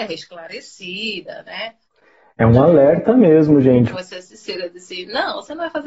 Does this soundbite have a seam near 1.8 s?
yes; 2 cuts; at 1.8 s, 3.9 s

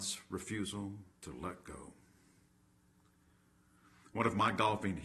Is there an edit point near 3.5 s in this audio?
no; 0 cuts

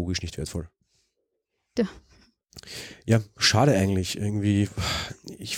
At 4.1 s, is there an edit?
no; 1 cut; at 1.8 s

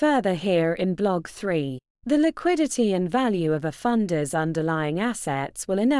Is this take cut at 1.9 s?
yes; 1 cut; at 1.9 s

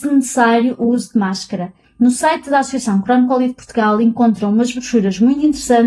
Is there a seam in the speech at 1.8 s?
yes; 1 cut; at 1.8 s

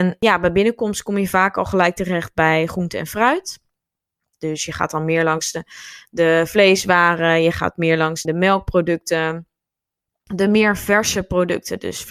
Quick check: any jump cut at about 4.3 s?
yes; 2 cuts; at 4.3 s, 8.2 s

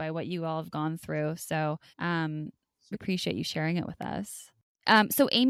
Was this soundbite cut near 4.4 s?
no; 2 cuts; at 1.9 s, 2.9 s

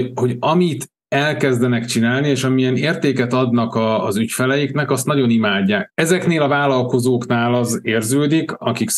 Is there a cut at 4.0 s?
no; 1 cut; at 5.9 s

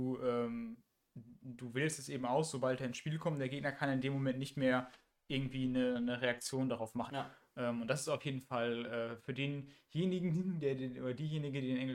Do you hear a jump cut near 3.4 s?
no; 1 cut; at 7.1 s

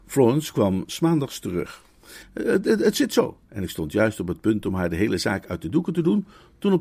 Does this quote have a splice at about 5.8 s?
no; 2 cuts; at 2.2 s, 3.5 s

